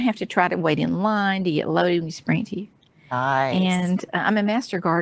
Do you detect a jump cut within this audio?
no; 0 cuts

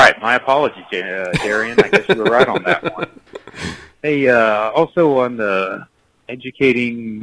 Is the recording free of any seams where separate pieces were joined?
yes; 0 cuts

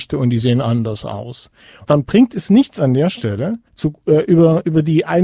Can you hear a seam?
yes; 2 cuts; at 1.9 s, 3.7 s

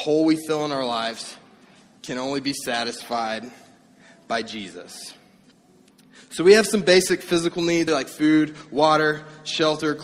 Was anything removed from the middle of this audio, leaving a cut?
yes; 1 cut; at 7.9 s

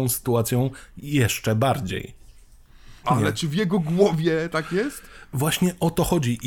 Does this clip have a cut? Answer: yes; 1 cut; at 3.0 s

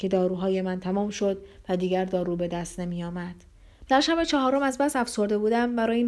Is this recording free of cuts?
no; 1 cut; at 3.9 s

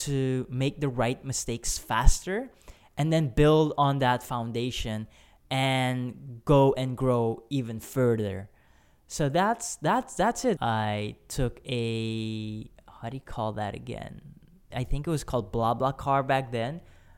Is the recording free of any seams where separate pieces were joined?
no; 2 cuts; at 10.6 s, 14.7 s

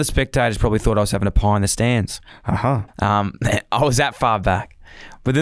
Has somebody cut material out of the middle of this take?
yes; 1 cut; at 2.9 s

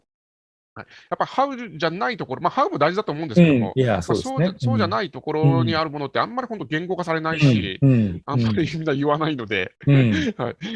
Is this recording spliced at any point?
no; 0 cuts

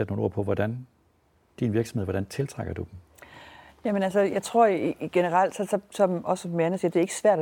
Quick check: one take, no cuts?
yes; 0 cuts

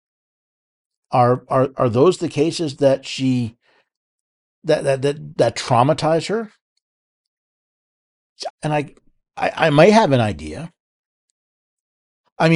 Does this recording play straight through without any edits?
no; 1 cut; at 8.5 s

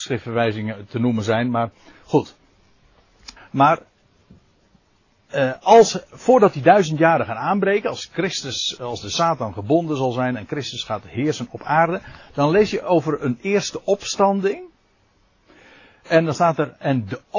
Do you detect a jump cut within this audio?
yes; 2 cuts; at 3.4 s, 6.1 s

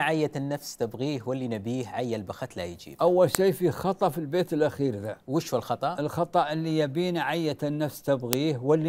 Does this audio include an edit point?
no; 0 cuts

